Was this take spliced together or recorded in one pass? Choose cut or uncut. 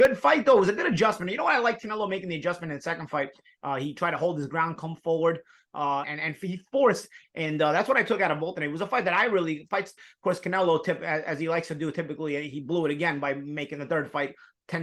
cut